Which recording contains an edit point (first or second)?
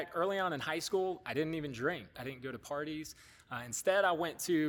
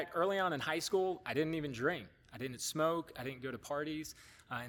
first